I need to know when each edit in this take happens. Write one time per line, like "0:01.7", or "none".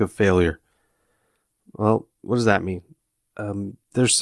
none